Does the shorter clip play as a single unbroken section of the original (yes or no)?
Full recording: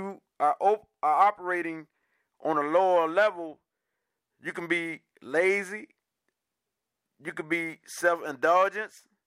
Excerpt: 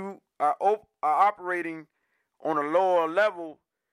yes